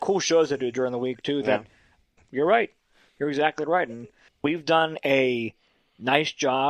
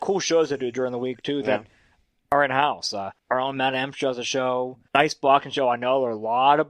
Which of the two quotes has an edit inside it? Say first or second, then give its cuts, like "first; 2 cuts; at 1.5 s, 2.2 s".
first; 1 cut; at 2.2 s